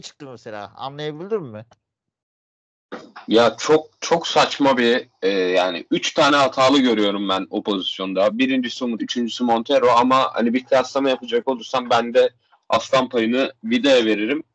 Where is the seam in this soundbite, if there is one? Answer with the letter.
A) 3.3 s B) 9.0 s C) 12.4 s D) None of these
B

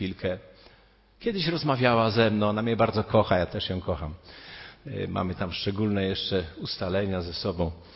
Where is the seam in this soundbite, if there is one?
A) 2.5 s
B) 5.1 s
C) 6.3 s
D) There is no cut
D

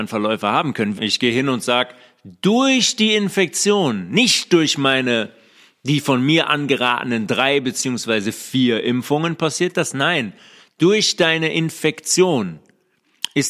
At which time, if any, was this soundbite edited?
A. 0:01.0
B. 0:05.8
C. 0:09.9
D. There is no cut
A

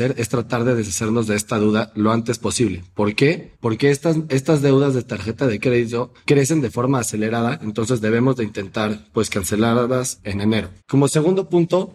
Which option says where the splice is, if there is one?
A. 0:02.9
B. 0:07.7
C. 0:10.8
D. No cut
C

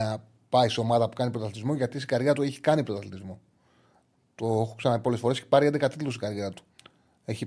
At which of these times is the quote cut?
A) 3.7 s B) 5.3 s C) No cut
C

